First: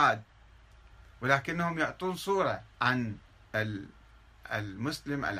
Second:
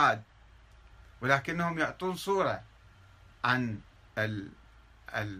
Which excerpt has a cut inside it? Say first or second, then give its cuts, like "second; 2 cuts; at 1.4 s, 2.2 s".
first; 1 cut; at 2.7 s